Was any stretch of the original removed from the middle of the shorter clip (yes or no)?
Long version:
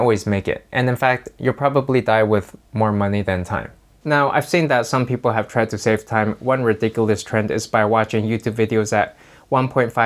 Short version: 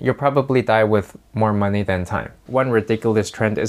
yes